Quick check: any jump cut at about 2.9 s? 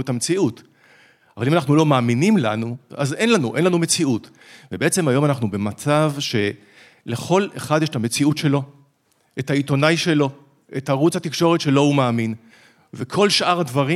yes; 1 cut; at 2.9 s

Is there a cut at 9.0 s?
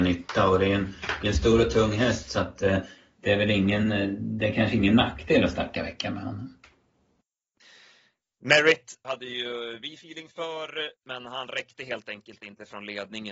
yes; 3 cuts; at 5.7 s, 9.0 s, 11.0 s

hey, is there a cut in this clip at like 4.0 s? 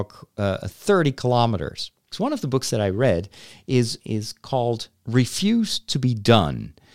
yes; 2 cuts; at 2.1 s, 4.0 s

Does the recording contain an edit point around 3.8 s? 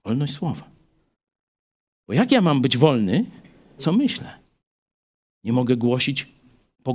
yes; 1 cut; at 3.8 s

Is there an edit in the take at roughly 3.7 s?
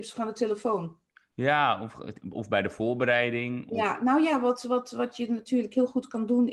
no; 0 cuts

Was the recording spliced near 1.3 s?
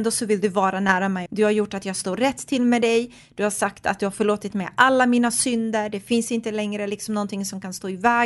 yes; 1 cut; at 1.3 s

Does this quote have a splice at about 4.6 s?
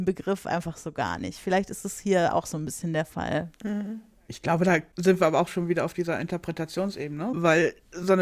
no; 0 cuts

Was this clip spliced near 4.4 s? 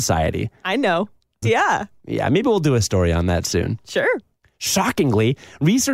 yes; 2 cuts; at 1.4 s, 4.4 s

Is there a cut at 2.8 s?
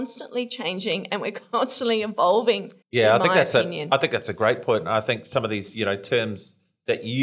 yes; 1 cut; at 2.8 s

